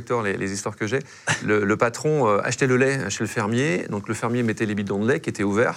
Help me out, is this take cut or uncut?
uncut